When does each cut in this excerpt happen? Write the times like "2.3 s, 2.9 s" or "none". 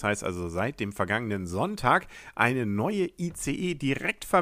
none